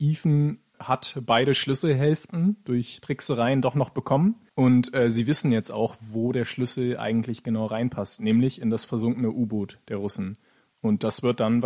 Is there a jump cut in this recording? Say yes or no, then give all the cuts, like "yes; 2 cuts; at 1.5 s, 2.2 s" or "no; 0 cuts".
no; 0 cuts